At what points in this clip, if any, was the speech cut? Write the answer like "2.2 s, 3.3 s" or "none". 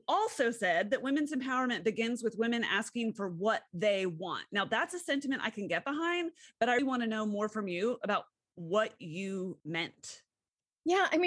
6.8 s